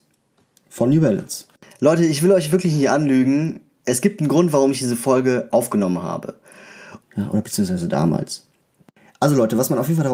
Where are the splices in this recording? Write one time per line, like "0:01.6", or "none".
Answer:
0:07.0